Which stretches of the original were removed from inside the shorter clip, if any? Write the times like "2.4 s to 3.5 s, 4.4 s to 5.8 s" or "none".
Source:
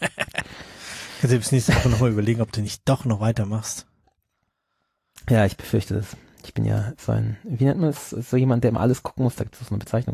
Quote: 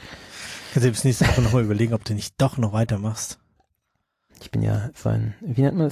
4.8 s to 6.3 s